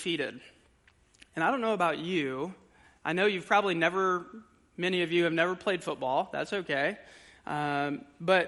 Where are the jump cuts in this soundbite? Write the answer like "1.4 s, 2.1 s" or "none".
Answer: none